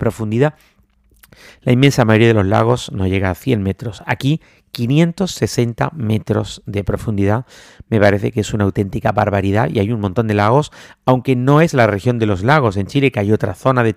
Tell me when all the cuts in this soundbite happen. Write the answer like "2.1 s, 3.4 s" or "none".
none